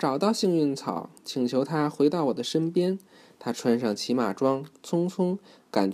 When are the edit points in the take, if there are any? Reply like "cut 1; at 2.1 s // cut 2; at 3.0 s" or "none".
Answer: none